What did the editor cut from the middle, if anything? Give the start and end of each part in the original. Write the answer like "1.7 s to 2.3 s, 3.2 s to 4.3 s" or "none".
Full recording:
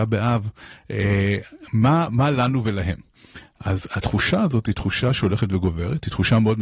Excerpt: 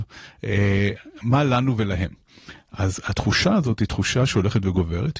1.7 s to 2.1 s